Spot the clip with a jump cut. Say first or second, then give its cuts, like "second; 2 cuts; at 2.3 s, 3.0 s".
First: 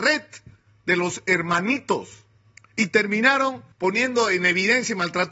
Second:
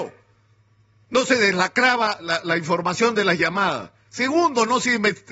first; 2 cuts; at 2.6 s, 3.7 s